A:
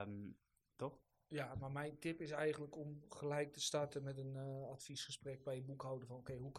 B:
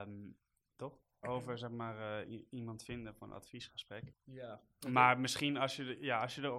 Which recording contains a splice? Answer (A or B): B